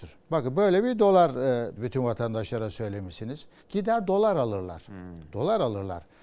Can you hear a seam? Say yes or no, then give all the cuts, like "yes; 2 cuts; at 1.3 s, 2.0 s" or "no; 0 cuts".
yes; 2 cuts; at 1.8 s, 3.6 s